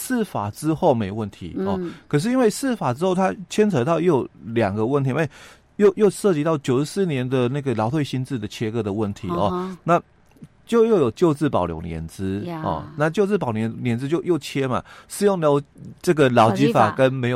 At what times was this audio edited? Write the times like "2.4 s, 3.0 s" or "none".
none